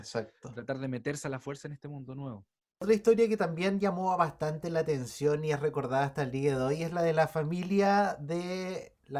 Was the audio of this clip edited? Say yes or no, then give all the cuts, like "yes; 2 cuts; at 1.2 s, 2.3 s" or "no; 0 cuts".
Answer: no; 0 cuts